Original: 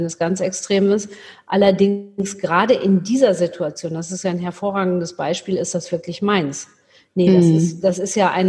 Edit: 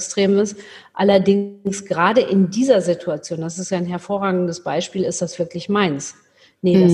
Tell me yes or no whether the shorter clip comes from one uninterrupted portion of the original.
yes